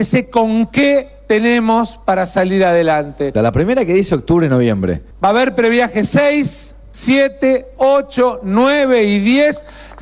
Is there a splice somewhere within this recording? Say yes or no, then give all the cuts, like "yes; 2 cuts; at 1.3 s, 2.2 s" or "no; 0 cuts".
yes; 2 cuts; at 3.3 s, 5.1 s